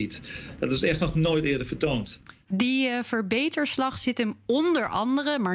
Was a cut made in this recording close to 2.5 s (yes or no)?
yes